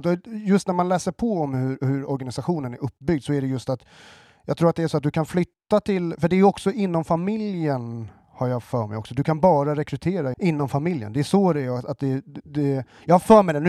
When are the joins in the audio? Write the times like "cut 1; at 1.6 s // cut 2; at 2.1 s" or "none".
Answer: cut 1; at 10.3 s